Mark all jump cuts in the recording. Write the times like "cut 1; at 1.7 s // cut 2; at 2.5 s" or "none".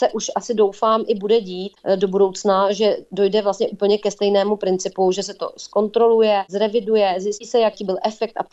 none